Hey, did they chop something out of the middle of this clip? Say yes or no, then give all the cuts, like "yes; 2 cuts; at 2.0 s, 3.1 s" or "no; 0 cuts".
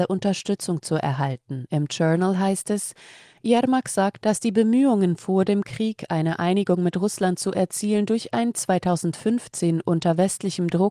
no; 0 cuts